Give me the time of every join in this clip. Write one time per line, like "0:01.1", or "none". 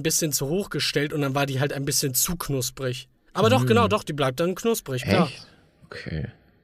none